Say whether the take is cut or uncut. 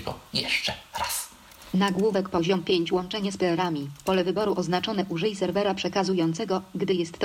uncut